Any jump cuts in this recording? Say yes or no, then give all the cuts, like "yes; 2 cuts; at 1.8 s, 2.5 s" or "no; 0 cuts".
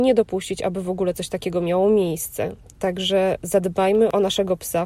no; 0 cuts